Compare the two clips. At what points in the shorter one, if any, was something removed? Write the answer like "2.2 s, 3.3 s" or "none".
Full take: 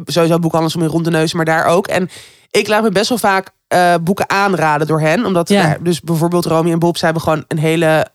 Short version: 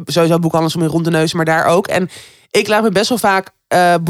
none